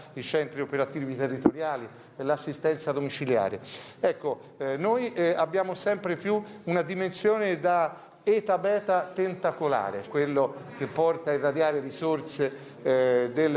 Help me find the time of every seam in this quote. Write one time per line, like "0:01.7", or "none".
0:10.0